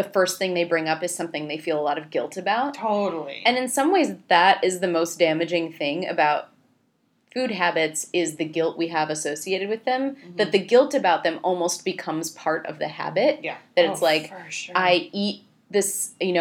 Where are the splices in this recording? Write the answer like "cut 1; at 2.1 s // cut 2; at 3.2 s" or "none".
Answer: none